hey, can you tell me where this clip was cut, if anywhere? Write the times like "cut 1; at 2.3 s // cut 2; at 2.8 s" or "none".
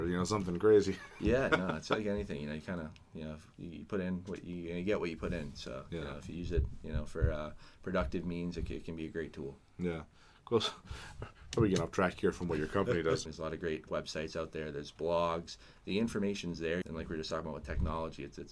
cut 1; at 13.3 s // cut 2; at 16.8 s